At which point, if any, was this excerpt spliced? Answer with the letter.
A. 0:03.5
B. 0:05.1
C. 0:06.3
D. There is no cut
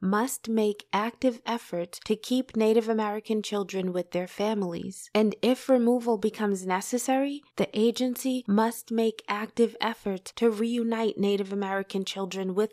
D